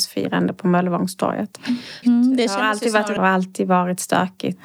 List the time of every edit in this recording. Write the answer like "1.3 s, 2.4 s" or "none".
2.0 s, 3.2 s